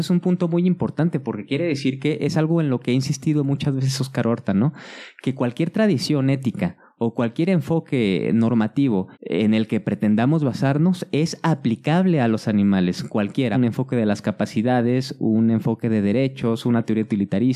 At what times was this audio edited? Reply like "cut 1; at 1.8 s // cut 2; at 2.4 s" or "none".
cut 1; at 9.1 s // cut 2; at 13.5 s